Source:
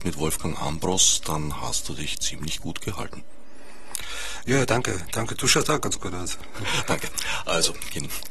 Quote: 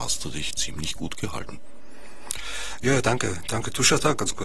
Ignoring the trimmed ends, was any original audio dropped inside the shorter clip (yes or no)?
no